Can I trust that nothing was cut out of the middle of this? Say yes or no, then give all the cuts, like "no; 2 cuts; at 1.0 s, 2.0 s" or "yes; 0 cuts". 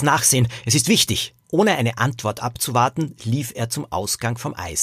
no; 1 cut; at 1.4 s